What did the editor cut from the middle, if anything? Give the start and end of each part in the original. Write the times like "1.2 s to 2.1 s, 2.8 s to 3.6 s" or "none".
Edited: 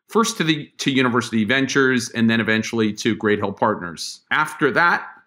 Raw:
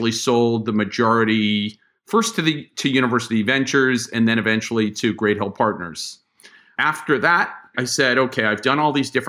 6.2 s to 6.7 s